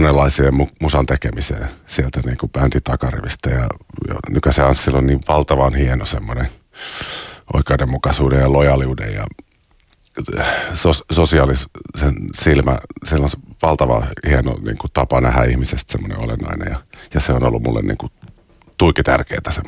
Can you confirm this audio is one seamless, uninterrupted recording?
yes; 0 cuts

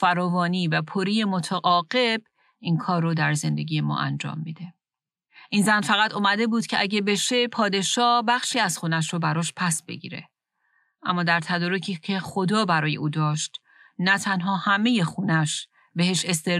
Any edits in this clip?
no; 0 cuts

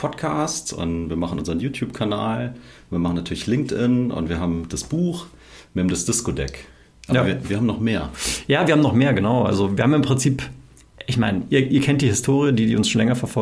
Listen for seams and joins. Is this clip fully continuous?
yes; 0 cuts

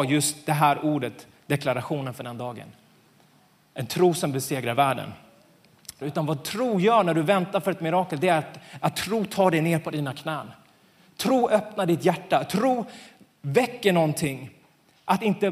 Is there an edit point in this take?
yes; 1 cut; at 6.0 s

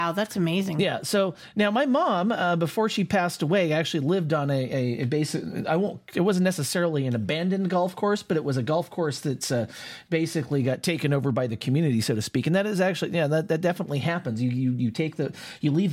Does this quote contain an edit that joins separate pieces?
no; 0 cuts

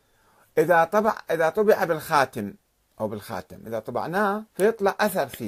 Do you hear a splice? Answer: yes; 1 cut; at 4.5 s

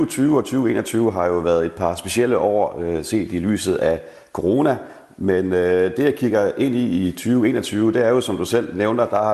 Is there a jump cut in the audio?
no; 0 cuts

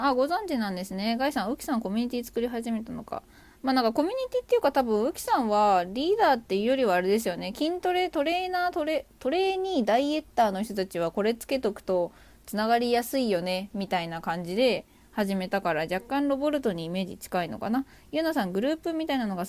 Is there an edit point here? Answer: no; 0 cuts

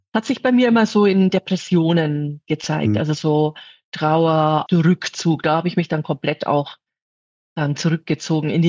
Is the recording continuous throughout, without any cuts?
no; 1 cut; at 4.7 s

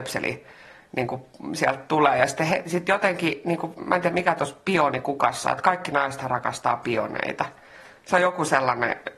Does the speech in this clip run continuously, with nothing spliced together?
no; 1 cut; at 4.1 s

